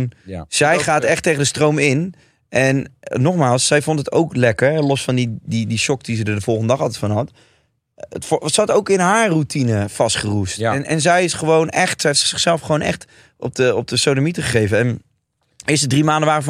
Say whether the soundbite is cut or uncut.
uncut